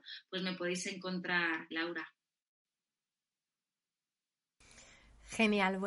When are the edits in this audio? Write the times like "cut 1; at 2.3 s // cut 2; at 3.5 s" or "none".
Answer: cut 1; at 1.7 s